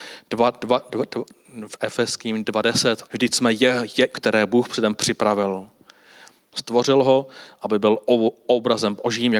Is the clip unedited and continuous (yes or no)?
no